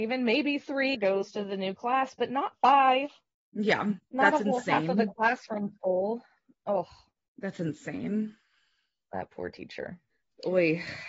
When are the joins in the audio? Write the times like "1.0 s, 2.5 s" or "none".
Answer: 0.9 s